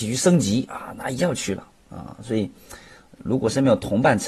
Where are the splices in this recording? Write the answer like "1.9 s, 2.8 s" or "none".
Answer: none